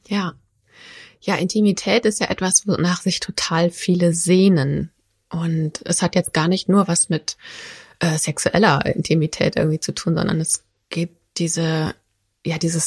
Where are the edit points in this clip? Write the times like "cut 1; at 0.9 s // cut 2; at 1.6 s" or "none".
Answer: none